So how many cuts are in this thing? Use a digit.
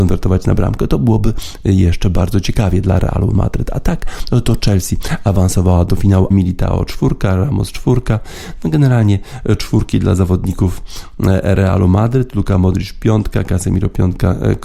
1